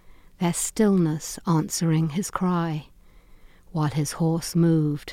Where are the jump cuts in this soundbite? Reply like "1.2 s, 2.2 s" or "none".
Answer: none